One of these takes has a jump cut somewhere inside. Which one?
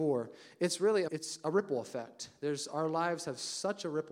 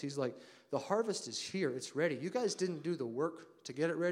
first; 1 cut; at 1.1 s

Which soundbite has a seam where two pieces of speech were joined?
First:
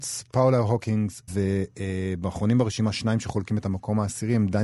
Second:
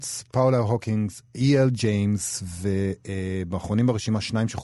first; 1 cut; at 1.3 s

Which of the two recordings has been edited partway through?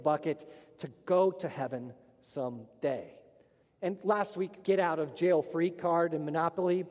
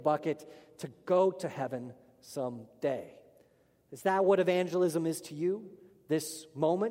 first; 2 cuts; at 3.6 s, 4.6 s

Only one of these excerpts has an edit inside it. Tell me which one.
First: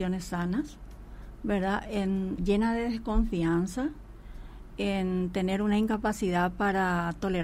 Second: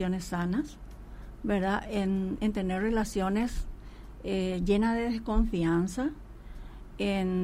first; 1 cut; at 2.4 s

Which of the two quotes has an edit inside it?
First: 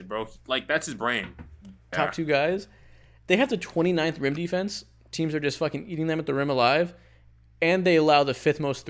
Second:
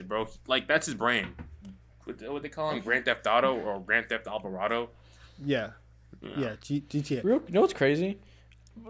first; 1 cut; at 1.9 s

